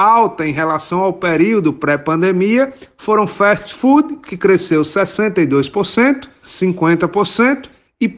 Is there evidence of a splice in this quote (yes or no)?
yes